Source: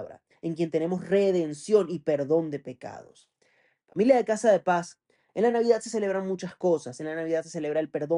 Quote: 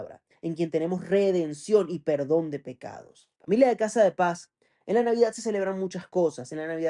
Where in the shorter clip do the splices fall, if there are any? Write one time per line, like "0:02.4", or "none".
0:03.3